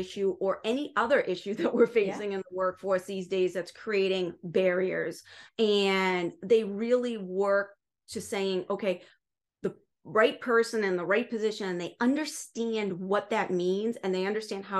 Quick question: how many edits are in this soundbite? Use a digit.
1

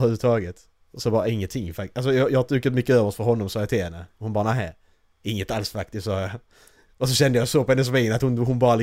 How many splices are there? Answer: 0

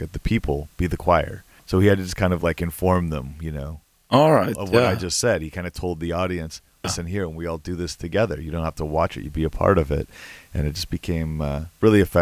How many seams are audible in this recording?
1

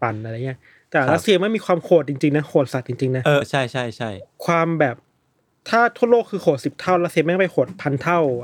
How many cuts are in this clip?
1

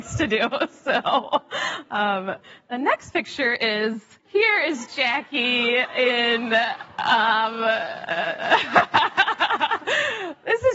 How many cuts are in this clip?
1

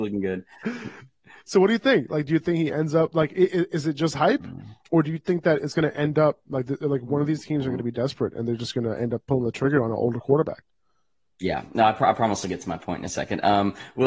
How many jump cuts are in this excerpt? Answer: 0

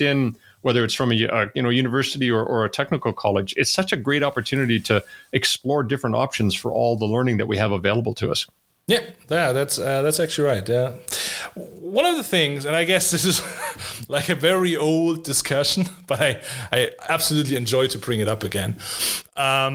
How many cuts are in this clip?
0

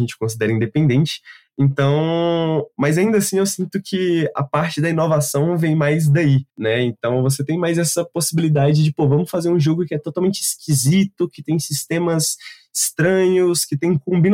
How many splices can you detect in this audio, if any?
1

